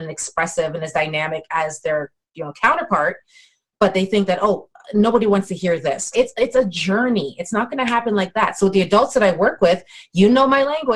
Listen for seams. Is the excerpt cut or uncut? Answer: cut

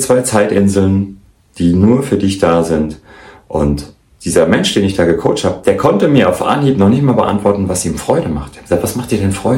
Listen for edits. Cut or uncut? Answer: uncut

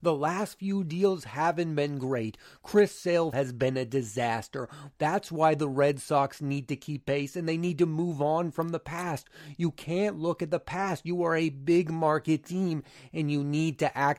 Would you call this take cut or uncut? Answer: cut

